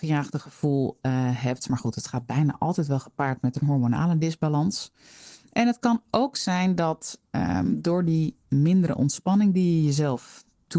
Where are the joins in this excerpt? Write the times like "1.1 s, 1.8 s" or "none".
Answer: none